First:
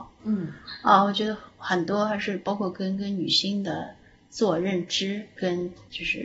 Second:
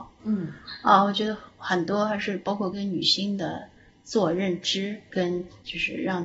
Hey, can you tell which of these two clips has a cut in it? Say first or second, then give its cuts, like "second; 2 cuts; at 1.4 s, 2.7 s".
second; 1 cut; at 2.7 s